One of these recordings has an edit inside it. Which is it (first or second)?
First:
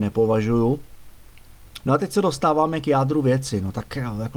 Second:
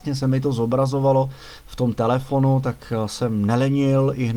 first